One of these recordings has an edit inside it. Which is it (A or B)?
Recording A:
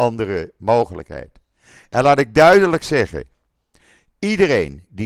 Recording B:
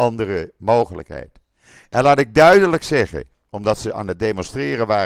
B